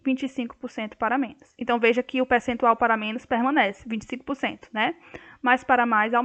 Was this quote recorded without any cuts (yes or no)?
yes